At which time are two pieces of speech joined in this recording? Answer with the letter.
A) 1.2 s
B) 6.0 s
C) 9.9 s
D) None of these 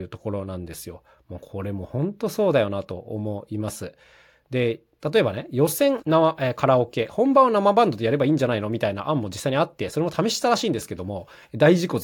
B